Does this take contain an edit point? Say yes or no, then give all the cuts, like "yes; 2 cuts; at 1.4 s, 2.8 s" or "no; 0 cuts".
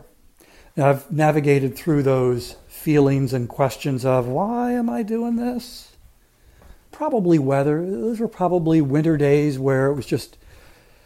yes; 1 cut; at 6.9 s